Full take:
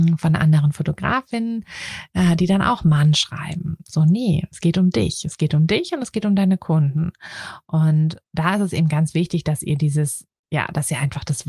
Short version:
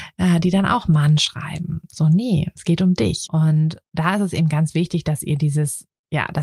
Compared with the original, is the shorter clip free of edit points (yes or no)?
no